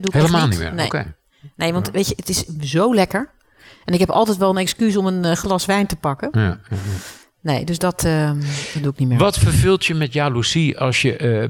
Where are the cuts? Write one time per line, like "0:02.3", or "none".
none